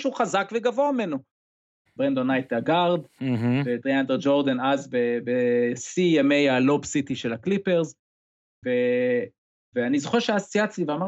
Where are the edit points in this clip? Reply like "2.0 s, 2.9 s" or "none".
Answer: 1.9 s